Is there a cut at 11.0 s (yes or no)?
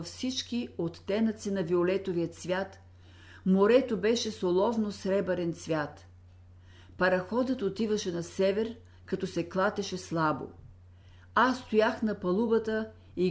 no